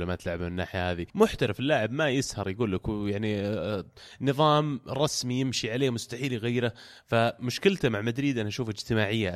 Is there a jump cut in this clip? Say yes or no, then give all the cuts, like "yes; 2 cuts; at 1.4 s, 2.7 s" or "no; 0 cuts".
yes; 1 cut; at 1.1 s